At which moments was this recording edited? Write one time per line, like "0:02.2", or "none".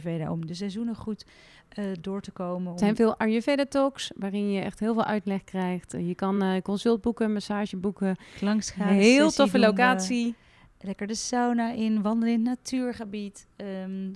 none